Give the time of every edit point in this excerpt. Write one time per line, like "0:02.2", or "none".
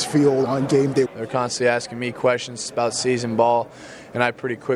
0:01.1